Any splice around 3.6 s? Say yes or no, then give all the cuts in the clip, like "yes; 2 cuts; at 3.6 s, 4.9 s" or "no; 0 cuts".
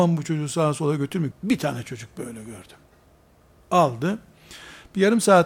no; 1 cut; at 1.3 s